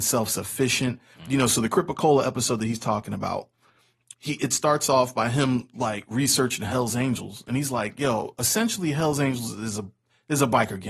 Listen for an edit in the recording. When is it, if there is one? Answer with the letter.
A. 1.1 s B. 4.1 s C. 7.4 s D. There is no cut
B